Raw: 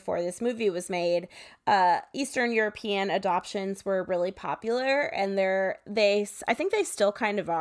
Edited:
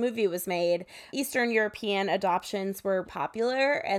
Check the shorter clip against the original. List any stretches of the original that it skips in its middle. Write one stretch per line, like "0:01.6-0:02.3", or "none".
0:01.5-0:02.1
0:04.1-0:04.3